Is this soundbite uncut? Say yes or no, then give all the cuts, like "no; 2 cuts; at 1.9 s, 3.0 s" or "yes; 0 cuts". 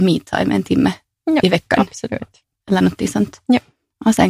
yes; 0 cuts